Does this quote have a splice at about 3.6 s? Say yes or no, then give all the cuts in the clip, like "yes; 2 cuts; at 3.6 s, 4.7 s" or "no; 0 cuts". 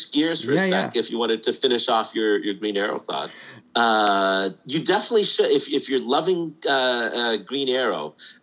yes; 1 cut; at 3.6 s